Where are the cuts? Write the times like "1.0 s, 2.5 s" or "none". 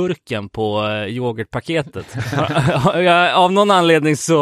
none